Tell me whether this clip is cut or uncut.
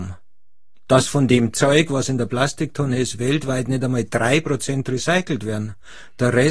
uncut